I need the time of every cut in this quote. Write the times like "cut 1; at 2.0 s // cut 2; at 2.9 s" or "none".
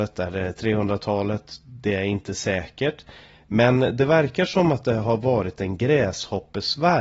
none